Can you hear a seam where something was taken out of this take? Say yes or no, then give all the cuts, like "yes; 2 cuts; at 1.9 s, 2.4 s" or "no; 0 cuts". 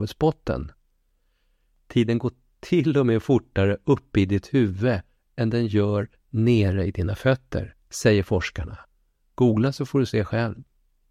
no; 0 cuts